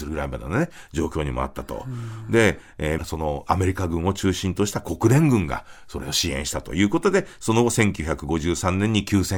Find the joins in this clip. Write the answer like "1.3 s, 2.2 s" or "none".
3.0 s